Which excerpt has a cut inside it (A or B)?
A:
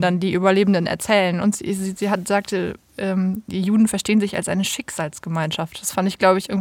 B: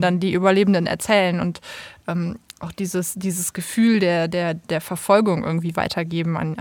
A